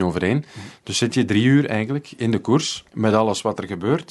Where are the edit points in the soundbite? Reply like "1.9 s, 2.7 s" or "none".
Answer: 2.9 s